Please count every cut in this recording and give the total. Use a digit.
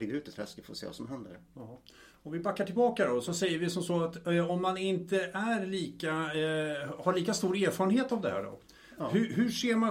0